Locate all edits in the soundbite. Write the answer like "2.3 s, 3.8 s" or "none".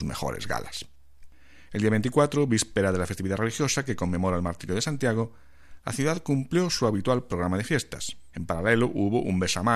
8.3 s